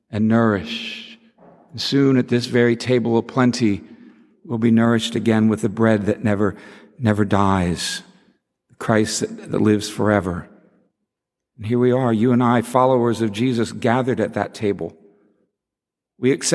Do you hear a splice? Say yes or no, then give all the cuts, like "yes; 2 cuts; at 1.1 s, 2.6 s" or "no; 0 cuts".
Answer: no; 0 cuts